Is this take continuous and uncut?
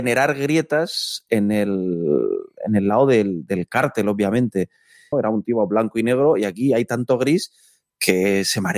no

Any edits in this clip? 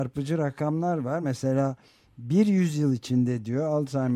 no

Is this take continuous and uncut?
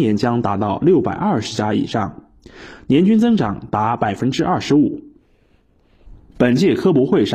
yes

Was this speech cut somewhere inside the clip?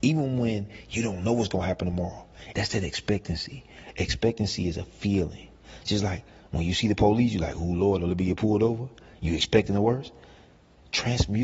yes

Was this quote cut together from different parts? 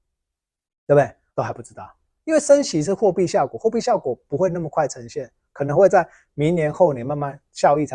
yes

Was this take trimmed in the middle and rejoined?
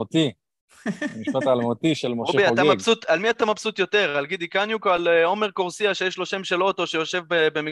no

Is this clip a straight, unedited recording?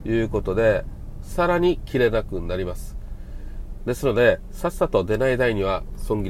no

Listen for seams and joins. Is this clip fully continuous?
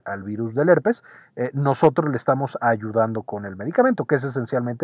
yes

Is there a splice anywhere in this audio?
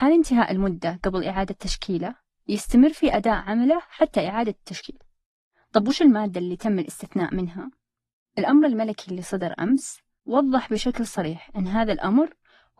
no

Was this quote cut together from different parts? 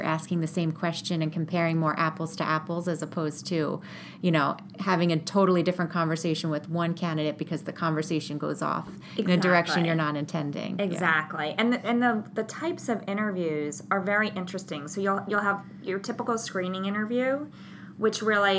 no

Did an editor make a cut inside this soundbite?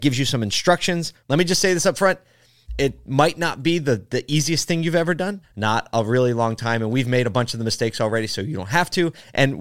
yes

